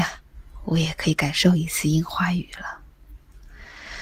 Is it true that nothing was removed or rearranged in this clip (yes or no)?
yes